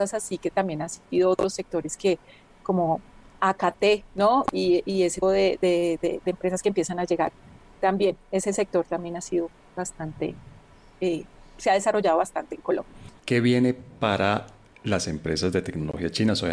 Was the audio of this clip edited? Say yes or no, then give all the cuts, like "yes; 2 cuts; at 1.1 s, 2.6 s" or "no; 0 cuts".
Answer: yes; 1 cut; at 5.2 s